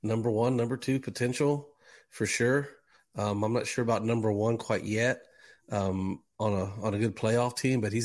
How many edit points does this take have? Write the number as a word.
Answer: zero